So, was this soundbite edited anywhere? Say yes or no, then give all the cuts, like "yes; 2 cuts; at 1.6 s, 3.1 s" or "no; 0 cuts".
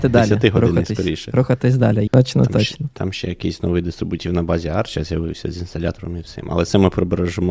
yes; 1 cut; at 2.1 s